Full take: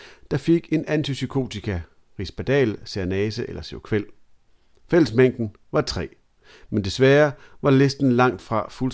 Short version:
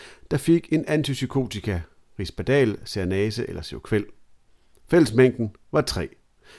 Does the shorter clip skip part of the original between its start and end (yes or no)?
no